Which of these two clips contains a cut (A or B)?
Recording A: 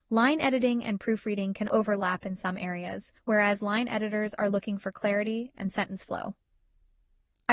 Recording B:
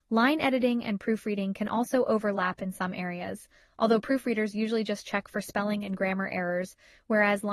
A